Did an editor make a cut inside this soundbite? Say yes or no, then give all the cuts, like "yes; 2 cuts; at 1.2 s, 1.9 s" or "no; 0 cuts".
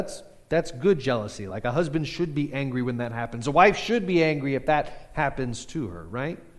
no; 0 cuts